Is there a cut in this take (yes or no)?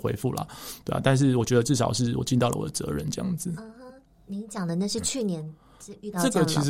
no